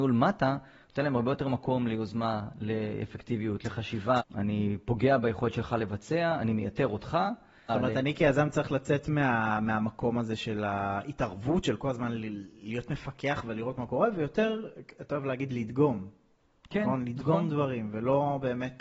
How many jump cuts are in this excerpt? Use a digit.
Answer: 2